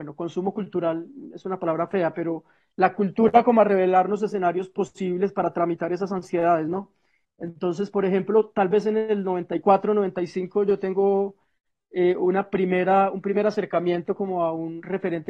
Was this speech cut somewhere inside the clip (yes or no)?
no